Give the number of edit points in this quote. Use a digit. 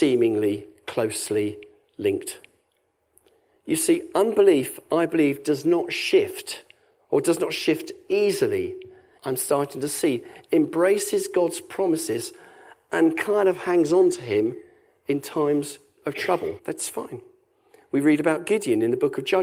2